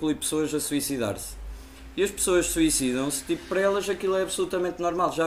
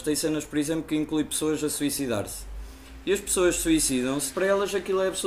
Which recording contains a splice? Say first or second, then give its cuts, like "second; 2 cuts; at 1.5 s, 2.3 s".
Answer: second; 1 cut; at 4.3 s